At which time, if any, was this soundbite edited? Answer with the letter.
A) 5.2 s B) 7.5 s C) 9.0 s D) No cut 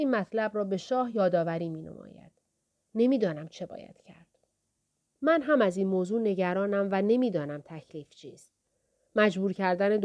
A